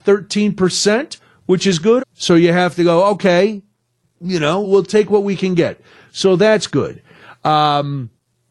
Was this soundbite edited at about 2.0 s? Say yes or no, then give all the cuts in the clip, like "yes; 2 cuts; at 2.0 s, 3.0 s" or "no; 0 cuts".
yes; 2 cuts; at 2.0 s, 4.6 s